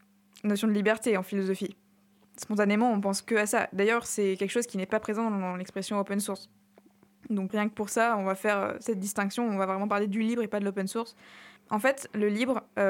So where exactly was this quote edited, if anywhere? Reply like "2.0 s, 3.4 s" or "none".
7.5 s, 11.6 s